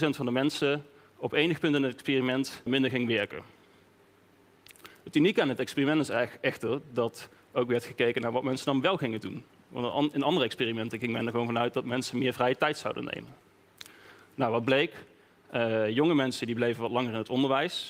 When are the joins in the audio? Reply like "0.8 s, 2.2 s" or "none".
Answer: 2.7 s